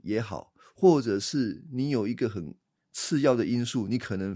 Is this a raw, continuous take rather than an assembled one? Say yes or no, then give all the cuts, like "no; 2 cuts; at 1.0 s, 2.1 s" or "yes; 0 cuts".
yes; 0 cuts